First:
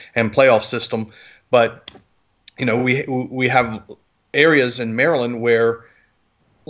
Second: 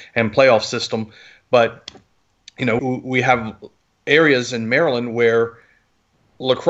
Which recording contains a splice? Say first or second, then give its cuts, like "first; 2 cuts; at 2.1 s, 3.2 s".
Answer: second; 1 cut; at 2.8 s